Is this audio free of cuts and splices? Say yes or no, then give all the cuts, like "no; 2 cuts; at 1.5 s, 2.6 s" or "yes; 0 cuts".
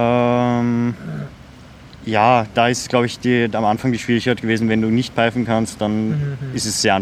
yes; 0 cuts